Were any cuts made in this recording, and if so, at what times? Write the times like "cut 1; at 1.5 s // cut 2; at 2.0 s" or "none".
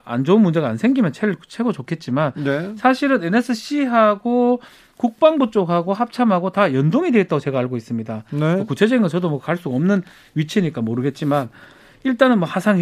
none